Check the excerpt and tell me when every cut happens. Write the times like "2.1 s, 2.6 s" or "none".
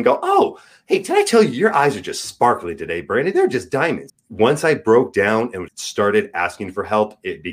4.1 s, 5.7 s